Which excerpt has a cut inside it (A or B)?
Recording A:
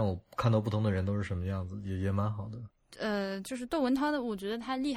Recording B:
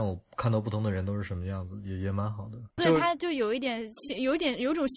B